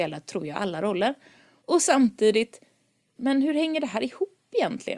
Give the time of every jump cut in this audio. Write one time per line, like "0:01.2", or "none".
0:01.6
0:03.2